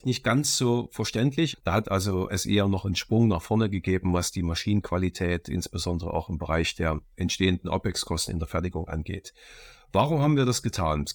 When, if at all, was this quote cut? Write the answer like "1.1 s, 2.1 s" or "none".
1.5 s